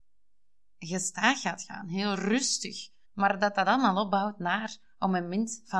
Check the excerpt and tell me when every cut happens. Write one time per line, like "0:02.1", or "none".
0:03.0